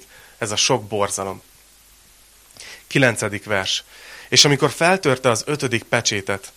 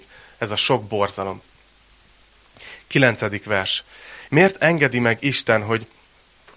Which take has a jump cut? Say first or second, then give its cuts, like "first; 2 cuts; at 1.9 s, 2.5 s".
second; 1 cut; at 4.3 s